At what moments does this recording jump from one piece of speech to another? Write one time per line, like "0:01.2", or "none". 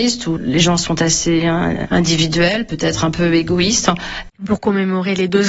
0:04.3

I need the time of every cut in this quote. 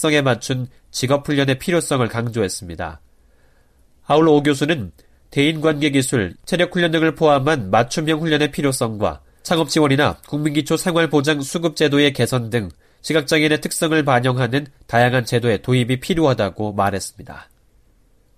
0:06.4

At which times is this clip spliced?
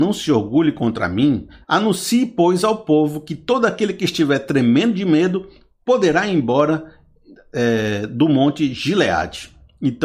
0:01.6

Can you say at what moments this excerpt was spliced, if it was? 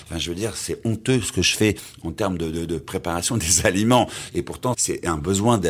0:04.7

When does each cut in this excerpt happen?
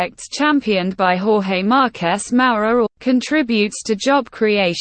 0:02.9

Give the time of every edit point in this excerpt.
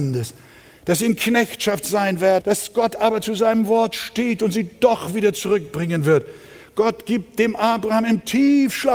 0:02.4

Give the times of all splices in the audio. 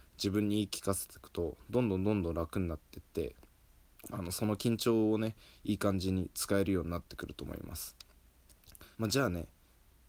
0:08.9

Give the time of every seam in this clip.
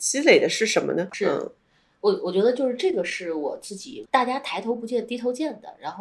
0:01.1
0:04.1

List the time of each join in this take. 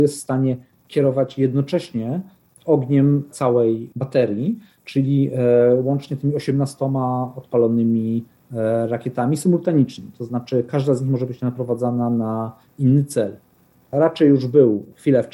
0:13.8

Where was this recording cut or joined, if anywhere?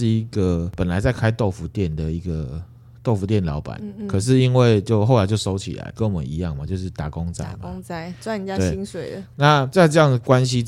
none

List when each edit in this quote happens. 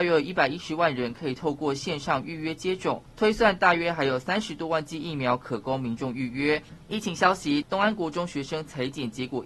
0:07.6

